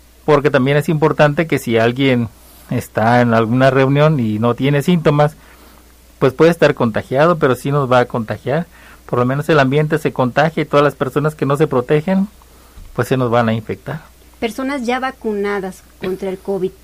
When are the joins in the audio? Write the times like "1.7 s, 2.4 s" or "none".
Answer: none